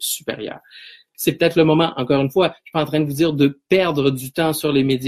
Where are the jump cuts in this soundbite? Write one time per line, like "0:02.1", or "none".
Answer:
0:01.1